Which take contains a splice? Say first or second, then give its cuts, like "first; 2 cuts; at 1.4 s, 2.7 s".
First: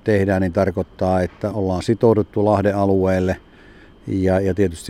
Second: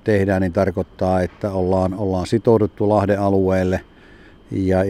first; 1 cut; at 1.5 s